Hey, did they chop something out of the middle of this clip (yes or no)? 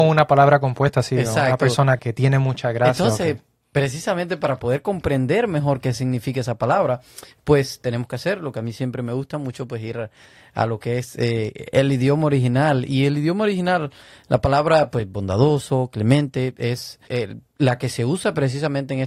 yes